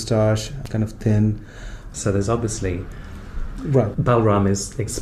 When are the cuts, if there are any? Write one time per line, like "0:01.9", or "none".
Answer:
0:01.9
0:03.9